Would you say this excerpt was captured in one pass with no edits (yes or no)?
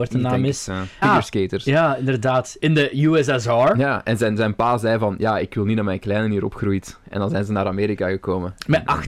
no